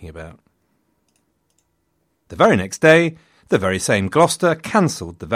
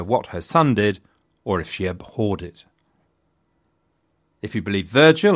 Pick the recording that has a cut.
first; 1 cut; at 2.1 s

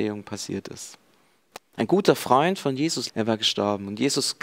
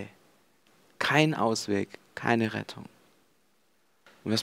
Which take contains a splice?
first; 2 cuts; at 1.6 s, 3.1 s

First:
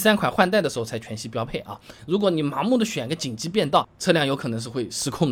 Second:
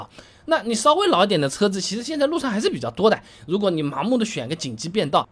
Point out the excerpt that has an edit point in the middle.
first; 1 cut; at 2.0 s

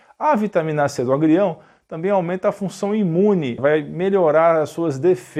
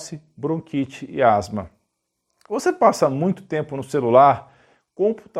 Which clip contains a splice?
first; 1 cut; at 3.6 s

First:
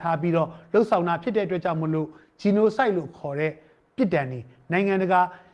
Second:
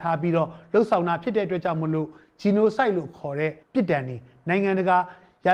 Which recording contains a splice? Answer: second; 1 cut; at 3.6 s

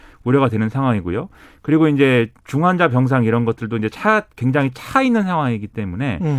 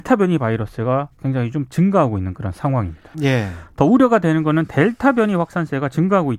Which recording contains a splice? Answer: second; 1 cut; at 3.1 s

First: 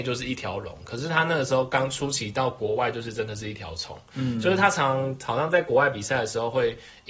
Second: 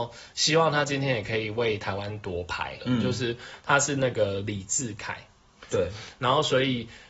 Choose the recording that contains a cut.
second; 2 cuts; at 2.8 s, 5.7 s

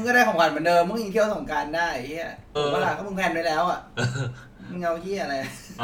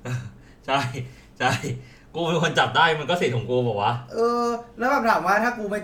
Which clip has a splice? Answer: first; 1 cut; at 2.6 s

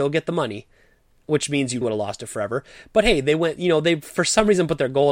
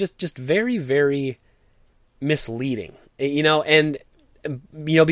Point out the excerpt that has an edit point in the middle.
first; 1 cut; at 1.8 s

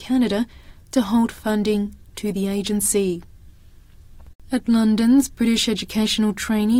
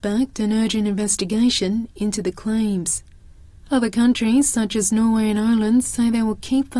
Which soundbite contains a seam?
first; 1 cut; at 4.3 s

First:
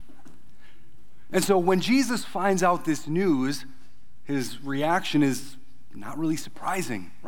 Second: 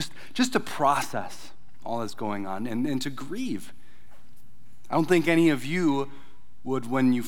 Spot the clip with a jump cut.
first; 1 cut; at 1.3 s

